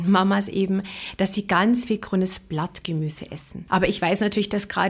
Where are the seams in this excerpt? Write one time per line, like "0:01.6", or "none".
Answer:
0:03.7